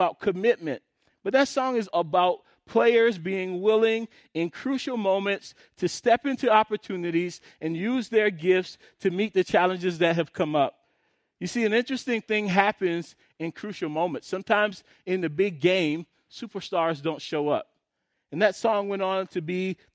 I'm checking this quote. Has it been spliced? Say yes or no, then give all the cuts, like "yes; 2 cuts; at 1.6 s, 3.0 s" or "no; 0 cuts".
yes; 2 cuts; at 1.9 s, 18.1 s